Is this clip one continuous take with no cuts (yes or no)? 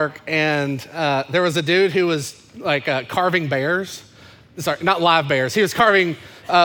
yes